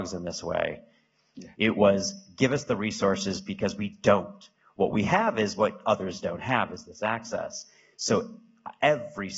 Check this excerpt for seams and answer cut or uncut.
cut